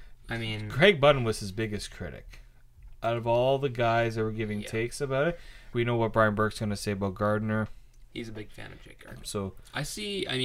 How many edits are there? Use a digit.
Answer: 2